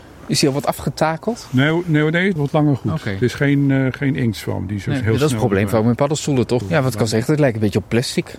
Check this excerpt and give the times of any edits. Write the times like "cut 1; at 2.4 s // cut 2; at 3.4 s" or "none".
cut 1; at 2.4 s // cut 2; at 6.6 s